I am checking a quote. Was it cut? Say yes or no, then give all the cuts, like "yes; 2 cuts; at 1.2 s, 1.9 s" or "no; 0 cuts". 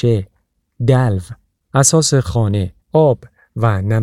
yes; 1 cut; at 2.8 s